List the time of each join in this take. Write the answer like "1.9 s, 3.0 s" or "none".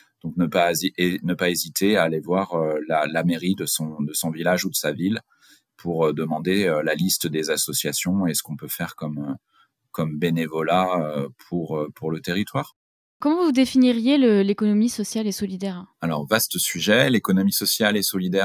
13.1 s, 15.9 s